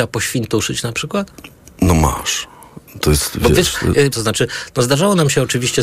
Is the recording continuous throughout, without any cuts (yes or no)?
no